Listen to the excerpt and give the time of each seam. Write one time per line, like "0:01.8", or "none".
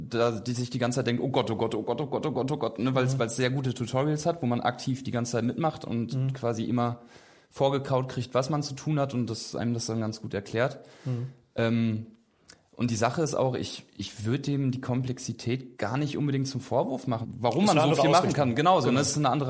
0:15.7
0:17.2